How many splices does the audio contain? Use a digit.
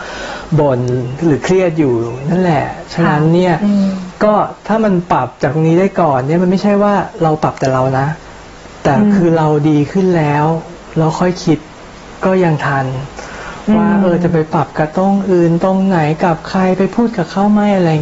0